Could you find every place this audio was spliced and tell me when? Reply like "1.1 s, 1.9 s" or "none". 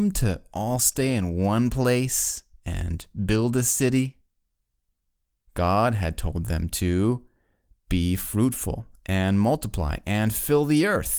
5.5 s